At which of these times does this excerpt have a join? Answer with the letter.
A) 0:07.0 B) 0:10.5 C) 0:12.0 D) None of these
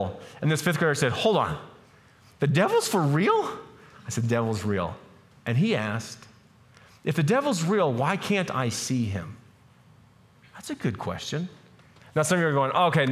C